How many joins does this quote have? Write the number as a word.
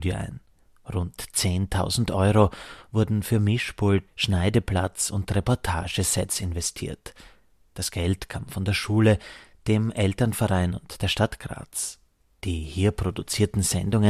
one